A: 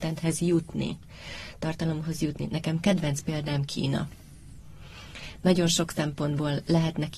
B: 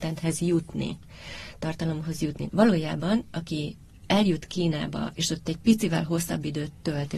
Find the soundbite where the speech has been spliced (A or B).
B